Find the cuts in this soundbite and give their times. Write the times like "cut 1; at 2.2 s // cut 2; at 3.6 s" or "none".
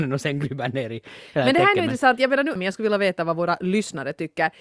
cut 1; at 2.6 s